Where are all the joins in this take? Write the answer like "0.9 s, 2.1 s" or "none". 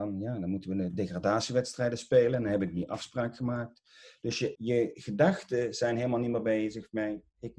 4.5 s